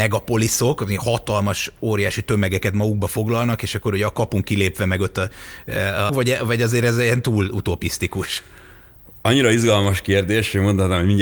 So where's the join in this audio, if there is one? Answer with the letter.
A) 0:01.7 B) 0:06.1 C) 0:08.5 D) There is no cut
B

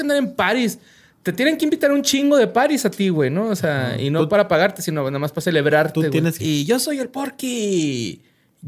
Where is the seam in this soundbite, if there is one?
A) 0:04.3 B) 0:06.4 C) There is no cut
B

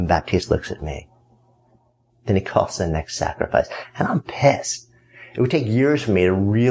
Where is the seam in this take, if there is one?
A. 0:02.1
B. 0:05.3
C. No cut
A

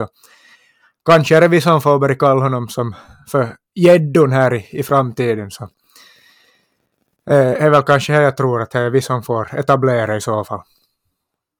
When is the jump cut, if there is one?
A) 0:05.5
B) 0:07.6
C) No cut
B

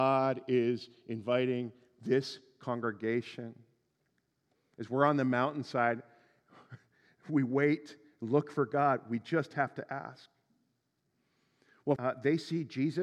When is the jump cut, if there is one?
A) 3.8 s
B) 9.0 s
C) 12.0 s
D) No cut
C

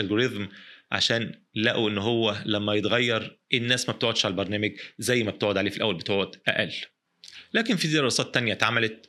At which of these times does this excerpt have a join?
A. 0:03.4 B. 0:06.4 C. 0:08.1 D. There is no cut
A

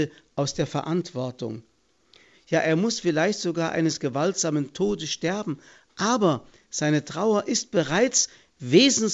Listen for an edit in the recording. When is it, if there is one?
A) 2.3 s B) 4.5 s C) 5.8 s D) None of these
A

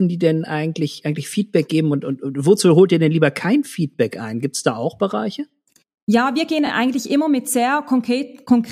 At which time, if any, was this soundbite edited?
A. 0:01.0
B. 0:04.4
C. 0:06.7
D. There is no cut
D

